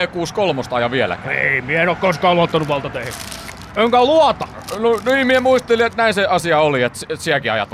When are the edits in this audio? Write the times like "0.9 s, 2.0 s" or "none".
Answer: none